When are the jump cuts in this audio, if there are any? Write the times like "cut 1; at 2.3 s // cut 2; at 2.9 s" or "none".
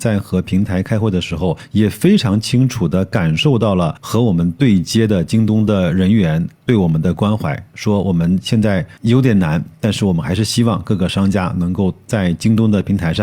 none